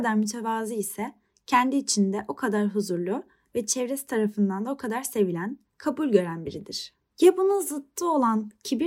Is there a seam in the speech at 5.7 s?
yes; 2 cuts; at 5.7 s, 7.1 s

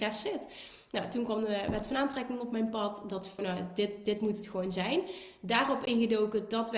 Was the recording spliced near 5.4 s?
no; 1 cut; at 3.4 s

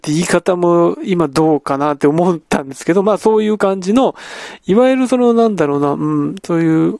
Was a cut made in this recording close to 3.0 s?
no; 0 cuts

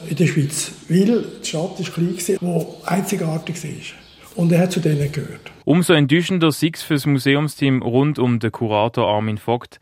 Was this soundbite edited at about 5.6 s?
yes; 2 cuts; at 2.4 s, 5.6 s

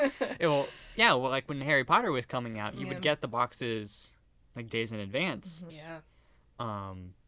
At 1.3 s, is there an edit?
no; 2 cuts; at 4.4 s, 5.7 s

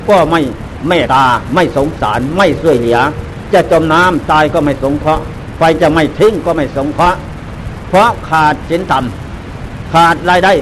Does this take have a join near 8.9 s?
no; 1 cut; at 1.1 s

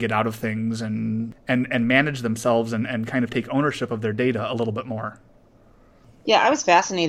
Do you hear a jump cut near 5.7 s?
no; 0 cuts

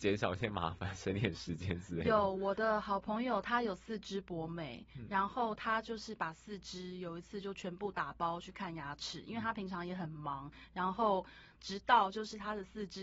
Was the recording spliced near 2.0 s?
no; 1 cut; at 11.6 s

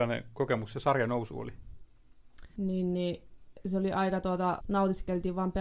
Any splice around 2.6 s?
yes; 2 cuts; at 2.6 s, 4.6 s

